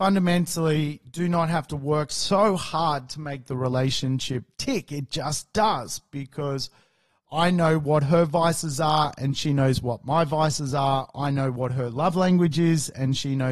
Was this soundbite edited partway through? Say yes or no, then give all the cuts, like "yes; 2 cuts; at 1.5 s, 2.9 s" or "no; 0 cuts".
no; 0 cuts